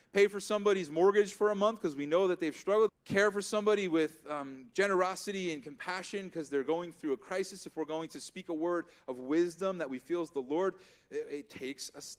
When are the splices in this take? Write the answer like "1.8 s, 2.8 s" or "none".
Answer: 2.9 s